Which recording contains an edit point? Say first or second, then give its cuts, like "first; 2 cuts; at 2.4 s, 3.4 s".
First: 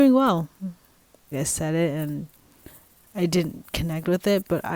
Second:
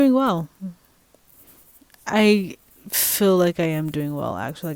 first; 1 cut; at 1.3 s